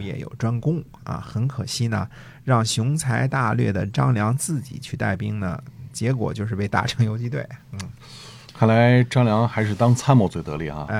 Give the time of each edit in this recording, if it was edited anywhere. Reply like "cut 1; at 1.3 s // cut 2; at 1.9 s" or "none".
none